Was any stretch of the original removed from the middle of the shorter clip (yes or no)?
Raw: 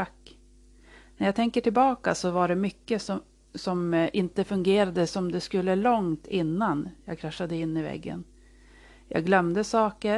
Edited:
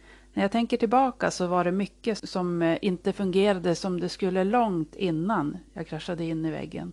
yes